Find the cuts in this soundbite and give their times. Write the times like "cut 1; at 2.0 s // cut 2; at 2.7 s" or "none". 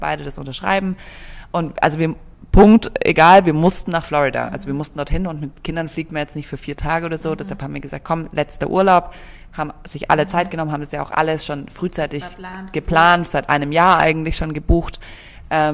none